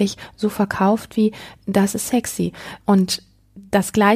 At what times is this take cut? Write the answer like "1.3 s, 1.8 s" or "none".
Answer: 2.8 s